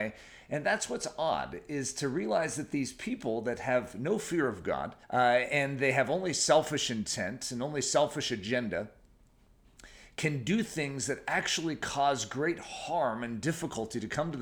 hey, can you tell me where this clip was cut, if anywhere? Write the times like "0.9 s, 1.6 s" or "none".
5.0 s